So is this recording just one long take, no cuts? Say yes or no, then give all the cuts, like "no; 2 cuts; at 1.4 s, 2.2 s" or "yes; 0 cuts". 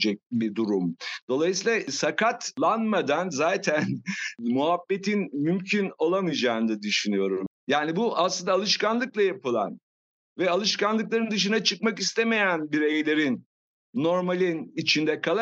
no; 1 cut; at 7.5 s